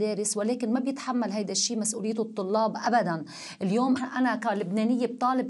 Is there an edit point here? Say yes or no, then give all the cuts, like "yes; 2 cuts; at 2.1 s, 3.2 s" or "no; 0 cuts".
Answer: yes; 1 cut; at 4.0 s